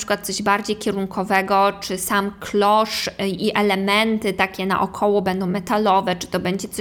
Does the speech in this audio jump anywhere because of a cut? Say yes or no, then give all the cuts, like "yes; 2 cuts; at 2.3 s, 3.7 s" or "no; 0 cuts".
no; 0 cuts